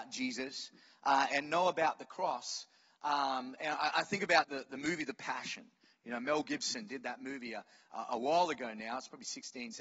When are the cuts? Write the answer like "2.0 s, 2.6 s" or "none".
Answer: 4.4 s